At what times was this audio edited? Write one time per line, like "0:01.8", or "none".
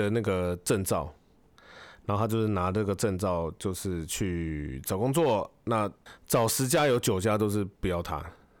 none